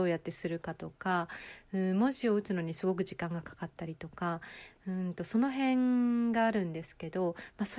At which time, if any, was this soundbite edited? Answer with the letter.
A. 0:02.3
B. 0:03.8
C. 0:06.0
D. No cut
D